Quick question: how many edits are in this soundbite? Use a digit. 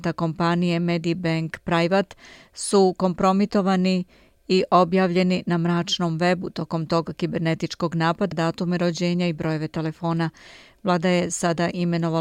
1